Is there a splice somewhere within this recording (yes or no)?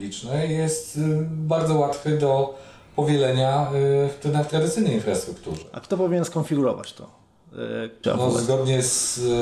yes